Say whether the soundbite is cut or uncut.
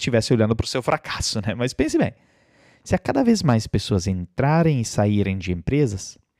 uncut